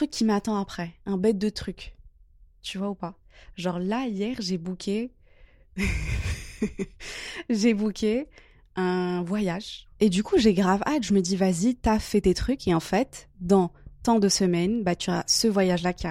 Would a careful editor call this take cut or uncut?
uncut